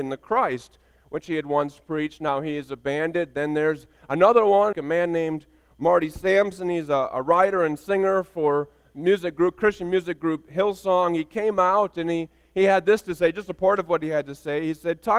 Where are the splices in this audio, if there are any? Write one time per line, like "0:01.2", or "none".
0:04.7